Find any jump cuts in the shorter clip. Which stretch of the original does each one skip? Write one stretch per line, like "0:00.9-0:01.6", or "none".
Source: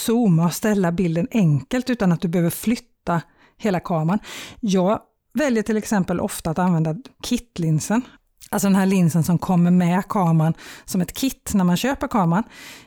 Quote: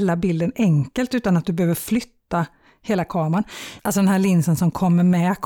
0:04.5-0:08.5

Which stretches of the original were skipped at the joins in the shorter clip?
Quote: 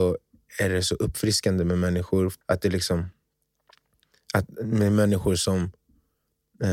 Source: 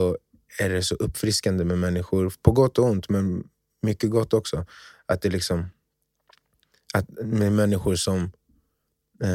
0:02.4-0:05.0

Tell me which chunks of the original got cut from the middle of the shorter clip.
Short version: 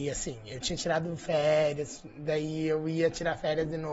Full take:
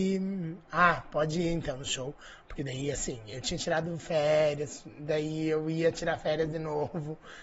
none

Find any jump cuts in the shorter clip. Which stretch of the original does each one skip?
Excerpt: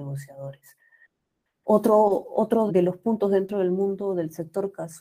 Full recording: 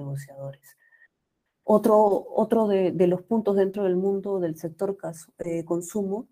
0:02.7-0:02.9

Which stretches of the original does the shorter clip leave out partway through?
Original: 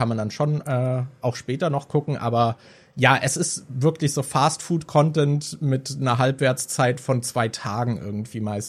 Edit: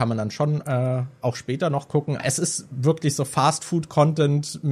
0:02.2-0:03.2

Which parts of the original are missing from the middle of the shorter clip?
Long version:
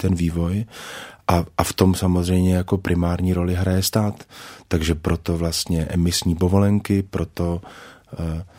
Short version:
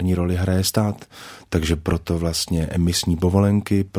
none

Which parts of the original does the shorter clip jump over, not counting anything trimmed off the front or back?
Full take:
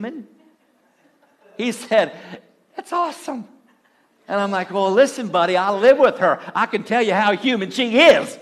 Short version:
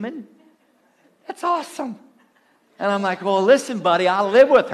0:01.1-0:02.6

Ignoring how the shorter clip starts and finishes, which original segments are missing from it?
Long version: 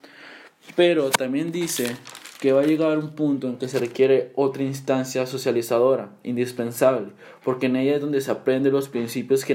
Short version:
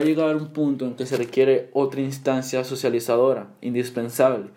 none

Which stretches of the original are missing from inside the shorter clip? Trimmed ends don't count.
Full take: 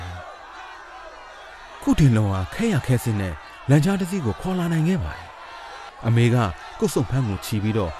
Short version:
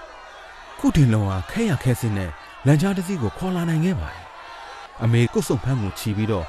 0:06.3-0:06.7

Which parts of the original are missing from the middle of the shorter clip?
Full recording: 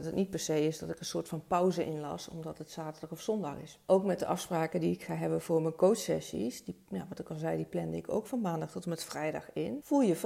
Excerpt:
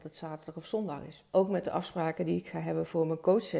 none

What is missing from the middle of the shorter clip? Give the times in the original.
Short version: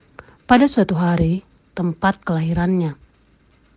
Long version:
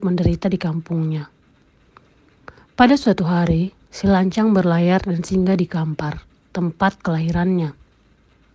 0:03.9-0:06.4

